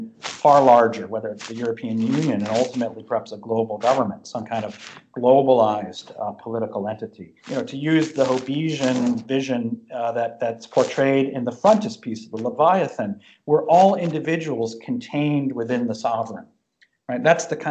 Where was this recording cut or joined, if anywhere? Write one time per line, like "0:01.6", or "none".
0:07.4